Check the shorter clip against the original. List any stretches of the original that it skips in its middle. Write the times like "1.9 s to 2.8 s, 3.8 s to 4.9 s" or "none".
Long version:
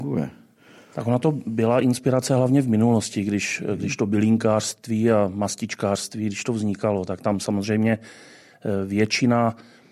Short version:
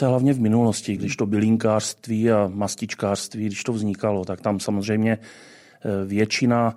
3.2 s to 3.8 s